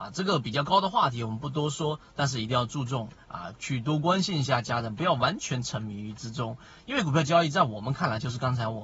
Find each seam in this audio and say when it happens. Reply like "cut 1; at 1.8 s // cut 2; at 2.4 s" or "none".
none